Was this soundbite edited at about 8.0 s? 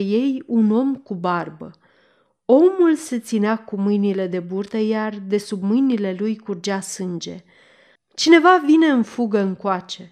yes; 1 cut; at 8.0 s

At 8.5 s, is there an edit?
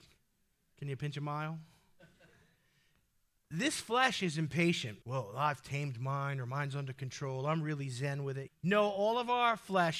yes; 2 cuts; at 5.0 s, 8.5 s

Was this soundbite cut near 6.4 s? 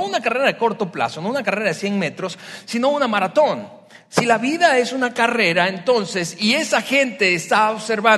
no; 0 cuts

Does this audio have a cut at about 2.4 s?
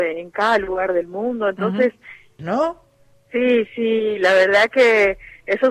yes; 1 cut; at 2.4 s

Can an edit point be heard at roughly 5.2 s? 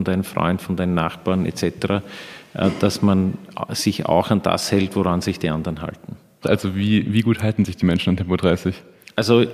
no; 1 cut; at 6.4 s

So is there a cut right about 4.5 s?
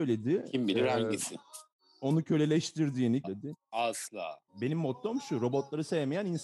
yes; 2 cuts; at 3.2 s, 4.5 s

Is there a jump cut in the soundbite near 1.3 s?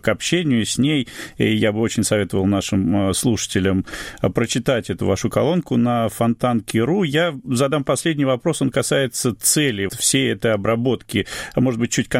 no; 1 cut; at 9.9 s

